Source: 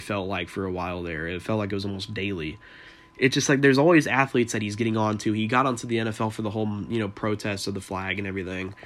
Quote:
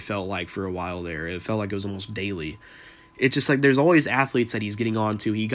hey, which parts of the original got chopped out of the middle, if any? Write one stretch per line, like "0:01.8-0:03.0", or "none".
none